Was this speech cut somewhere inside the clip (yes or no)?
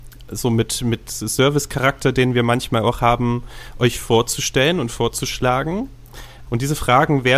yes